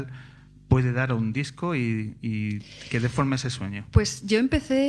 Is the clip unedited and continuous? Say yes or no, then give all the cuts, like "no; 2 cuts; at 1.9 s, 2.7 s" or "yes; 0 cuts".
yes; 0 cuts